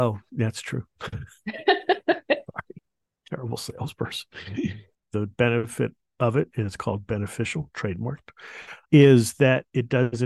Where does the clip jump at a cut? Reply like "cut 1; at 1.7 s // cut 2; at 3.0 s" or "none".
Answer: cut 1; at 5.0 s // cut 2; at 8.8 s